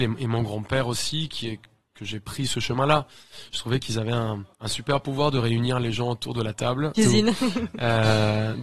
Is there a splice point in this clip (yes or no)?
yes